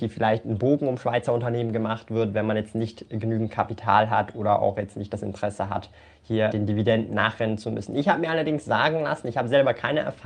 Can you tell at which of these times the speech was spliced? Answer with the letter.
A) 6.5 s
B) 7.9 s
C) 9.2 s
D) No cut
A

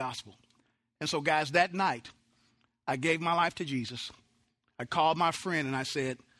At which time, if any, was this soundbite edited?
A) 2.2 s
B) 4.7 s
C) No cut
C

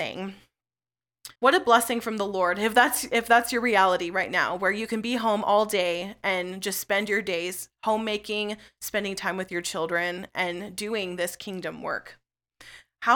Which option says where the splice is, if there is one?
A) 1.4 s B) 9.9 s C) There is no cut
A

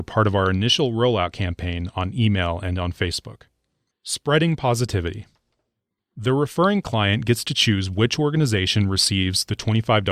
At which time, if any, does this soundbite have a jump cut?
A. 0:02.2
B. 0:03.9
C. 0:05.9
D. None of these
D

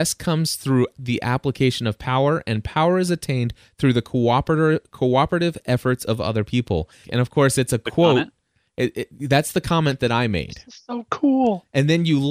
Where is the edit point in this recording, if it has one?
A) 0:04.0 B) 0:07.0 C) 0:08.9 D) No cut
B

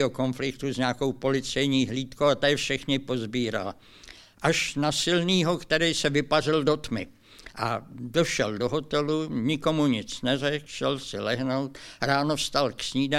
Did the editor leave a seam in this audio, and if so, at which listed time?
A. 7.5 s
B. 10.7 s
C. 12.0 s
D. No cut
D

